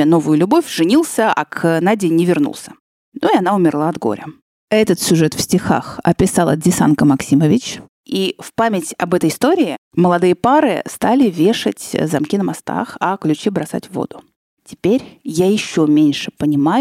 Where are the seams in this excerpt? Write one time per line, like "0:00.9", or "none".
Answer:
none

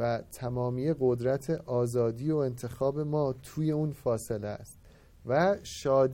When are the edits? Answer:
none

